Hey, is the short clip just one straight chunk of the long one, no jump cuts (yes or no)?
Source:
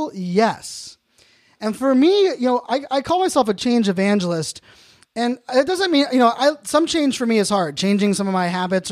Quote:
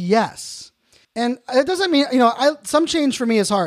no